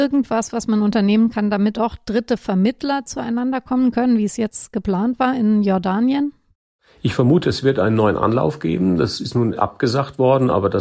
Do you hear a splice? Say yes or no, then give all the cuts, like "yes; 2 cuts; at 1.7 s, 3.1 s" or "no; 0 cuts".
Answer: yes; 1 cut; at 1.7 s